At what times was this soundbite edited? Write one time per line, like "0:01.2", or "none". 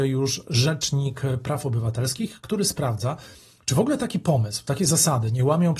none